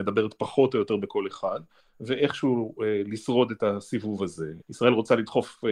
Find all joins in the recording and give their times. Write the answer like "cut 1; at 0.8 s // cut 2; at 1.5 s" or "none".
cut 1; at 1.8 s // cut 2; at 4.6 s